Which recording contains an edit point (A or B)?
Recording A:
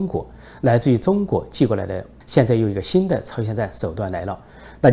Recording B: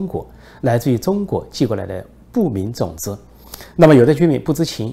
A